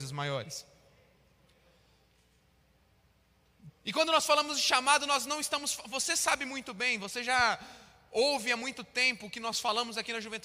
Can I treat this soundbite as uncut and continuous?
no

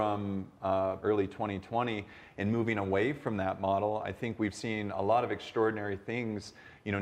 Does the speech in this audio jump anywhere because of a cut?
yes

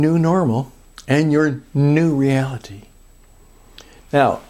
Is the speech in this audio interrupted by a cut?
no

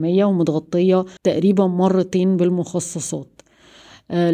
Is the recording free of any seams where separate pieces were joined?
no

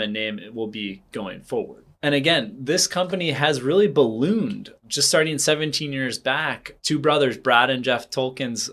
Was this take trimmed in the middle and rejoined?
no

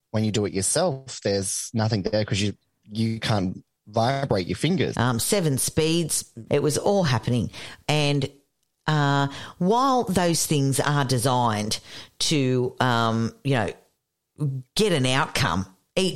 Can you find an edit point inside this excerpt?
yes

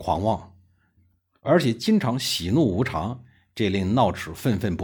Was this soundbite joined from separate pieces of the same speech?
no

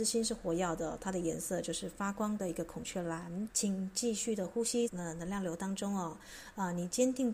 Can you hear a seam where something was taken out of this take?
yes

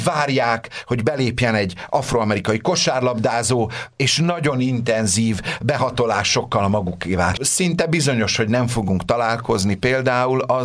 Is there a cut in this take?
yes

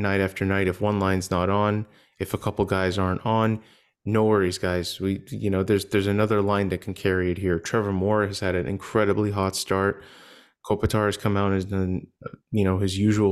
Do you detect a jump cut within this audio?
no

